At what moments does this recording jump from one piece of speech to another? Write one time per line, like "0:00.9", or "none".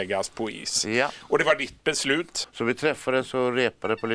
0:02.4